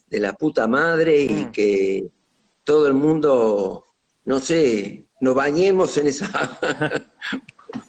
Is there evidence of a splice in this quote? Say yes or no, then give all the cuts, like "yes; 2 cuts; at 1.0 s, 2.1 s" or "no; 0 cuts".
no; 0 cuts